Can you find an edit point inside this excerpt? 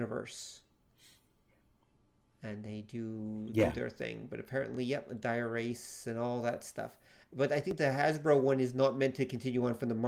no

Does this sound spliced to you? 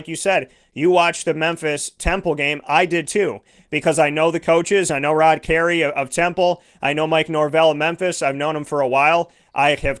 no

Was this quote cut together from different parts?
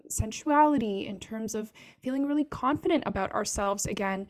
no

